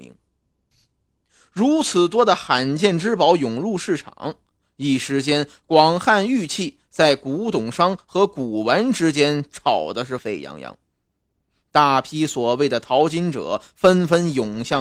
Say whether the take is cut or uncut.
cut